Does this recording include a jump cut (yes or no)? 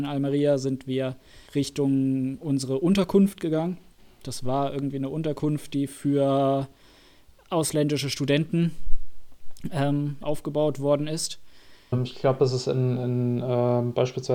yes